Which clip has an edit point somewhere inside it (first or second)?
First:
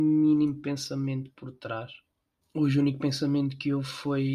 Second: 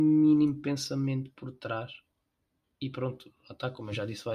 first